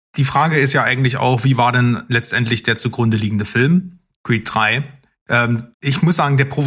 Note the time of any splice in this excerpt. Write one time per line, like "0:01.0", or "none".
0:05.7